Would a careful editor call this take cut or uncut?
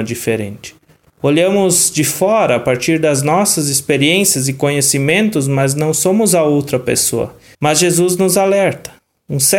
cut